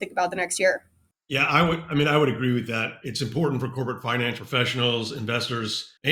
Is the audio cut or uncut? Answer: uncut